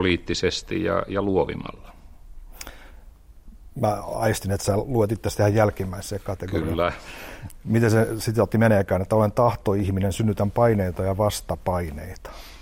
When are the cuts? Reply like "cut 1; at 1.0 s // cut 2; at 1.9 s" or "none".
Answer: none